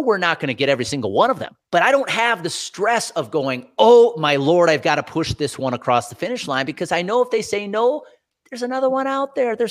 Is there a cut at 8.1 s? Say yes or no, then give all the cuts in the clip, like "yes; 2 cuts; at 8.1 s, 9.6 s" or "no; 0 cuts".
no; 1 cut; at 1.6 s